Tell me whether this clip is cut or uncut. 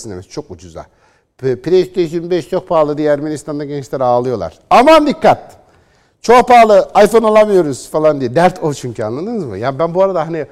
uncut